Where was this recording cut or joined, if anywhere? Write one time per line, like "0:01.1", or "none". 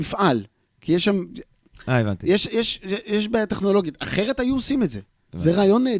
none